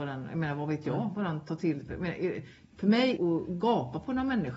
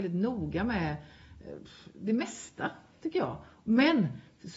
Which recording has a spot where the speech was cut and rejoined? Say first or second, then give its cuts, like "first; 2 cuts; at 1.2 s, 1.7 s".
first; 1 cut; at 3.2 s